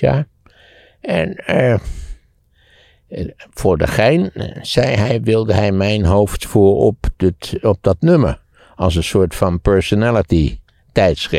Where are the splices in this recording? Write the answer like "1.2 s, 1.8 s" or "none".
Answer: none